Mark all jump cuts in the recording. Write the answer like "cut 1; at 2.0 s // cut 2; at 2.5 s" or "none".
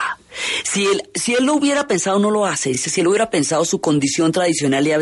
none